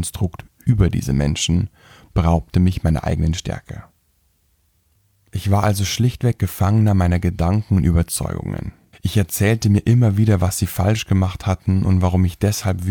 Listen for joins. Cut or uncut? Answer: cut